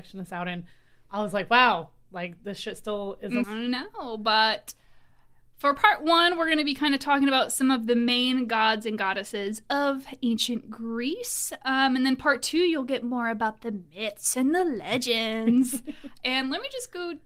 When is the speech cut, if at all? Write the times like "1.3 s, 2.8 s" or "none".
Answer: 3.4 s